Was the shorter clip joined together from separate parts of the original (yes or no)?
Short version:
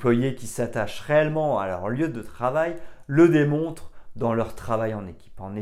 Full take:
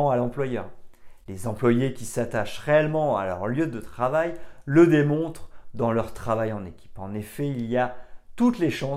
no